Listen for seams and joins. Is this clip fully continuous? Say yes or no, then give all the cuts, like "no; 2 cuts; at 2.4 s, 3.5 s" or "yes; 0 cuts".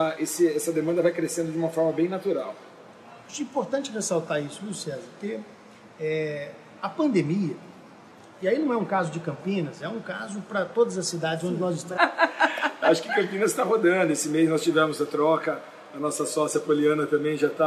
no; 1 cut; at 12.0 s